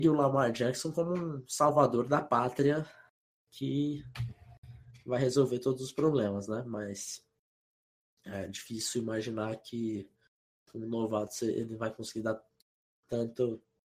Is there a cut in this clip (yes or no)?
no